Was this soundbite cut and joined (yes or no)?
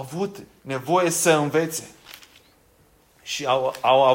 no